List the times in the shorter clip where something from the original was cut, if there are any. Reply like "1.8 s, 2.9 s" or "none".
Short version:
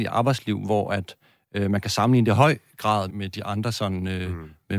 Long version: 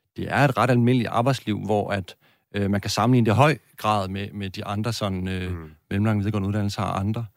3.1 s